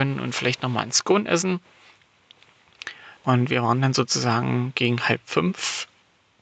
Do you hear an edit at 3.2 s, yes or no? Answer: yes